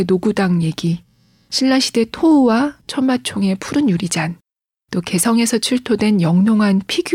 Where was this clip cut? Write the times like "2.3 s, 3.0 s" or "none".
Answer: 4.8 s